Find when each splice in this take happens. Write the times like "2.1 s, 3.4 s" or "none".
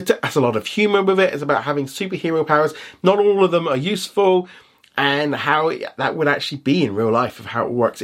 none